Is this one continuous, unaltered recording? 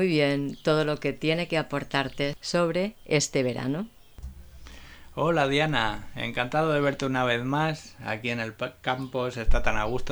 yes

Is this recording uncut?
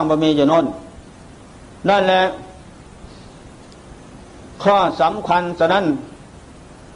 yes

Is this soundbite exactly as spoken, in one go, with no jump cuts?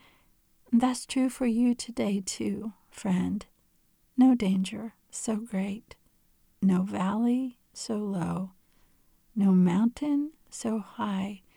yes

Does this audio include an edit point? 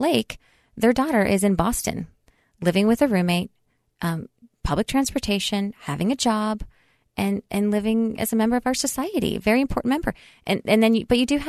no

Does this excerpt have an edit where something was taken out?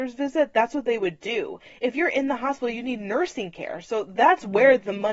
no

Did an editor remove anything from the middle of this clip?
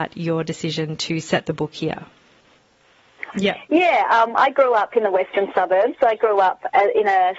yes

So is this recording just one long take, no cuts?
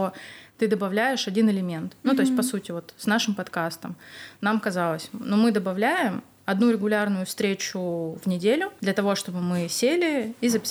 yes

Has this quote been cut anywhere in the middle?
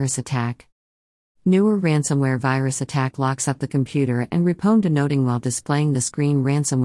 no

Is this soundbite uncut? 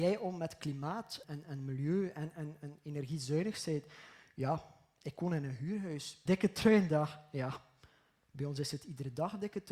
no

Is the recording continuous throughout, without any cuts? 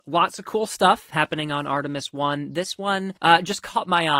no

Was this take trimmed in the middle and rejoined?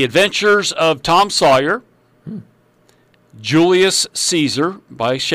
no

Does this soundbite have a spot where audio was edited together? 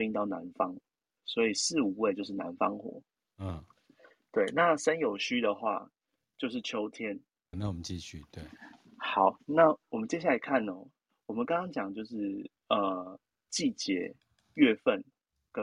yes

